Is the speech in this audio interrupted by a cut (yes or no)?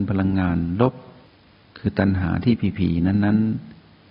no